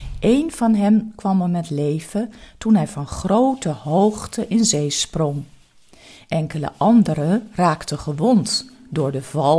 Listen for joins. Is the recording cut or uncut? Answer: uncut